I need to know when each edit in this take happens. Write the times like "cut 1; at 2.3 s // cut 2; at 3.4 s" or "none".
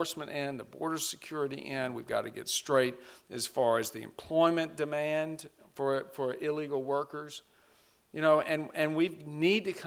none